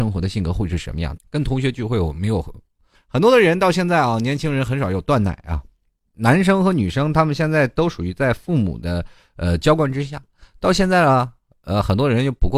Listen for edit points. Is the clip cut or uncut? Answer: cut